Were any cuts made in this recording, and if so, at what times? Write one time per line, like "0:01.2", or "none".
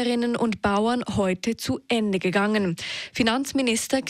none